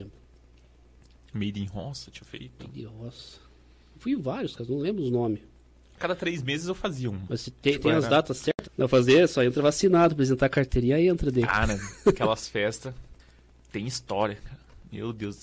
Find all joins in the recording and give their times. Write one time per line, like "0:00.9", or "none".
0:08.7
0:13.2